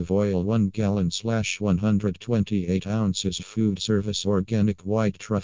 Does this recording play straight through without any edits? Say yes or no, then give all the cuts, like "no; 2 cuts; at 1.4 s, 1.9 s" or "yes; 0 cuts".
no; 1 cut; at 3.4 s